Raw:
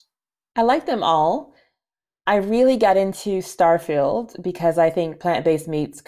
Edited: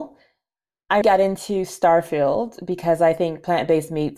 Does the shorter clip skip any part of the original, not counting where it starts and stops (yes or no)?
yes